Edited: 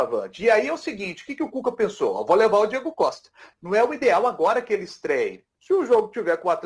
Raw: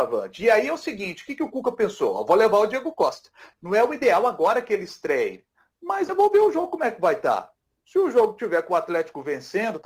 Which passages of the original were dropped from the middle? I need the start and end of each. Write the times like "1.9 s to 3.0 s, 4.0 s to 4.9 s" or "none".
5.5 s to 7.8 s